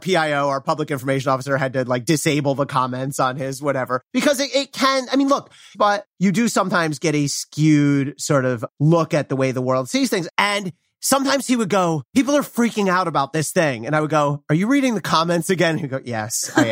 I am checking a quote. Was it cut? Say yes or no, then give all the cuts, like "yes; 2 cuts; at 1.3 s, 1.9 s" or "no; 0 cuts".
yes; 2 cuts; at 5.7 s, 10.3 s